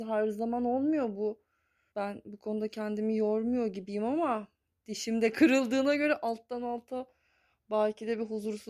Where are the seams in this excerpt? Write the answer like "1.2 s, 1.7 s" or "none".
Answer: 1.9 s